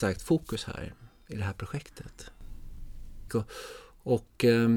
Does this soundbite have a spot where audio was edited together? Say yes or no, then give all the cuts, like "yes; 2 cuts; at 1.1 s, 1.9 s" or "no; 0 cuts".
yes; 1 cut; at 3.3 s